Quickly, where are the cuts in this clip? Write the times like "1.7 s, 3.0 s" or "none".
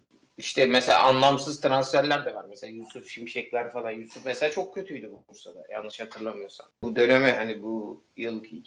6.7 s